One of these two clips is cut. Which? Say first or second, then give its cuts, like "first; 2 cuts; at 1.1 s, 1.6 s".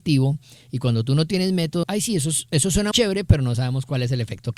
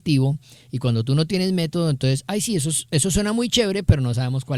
first; 2 cuts; at 1.8 s, 2.9 s